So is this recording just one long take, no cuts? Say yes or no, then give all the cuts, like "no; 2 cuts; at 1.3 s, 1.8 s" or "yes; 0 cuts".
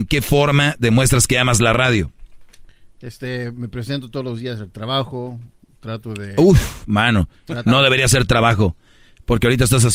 yes; 0 cuts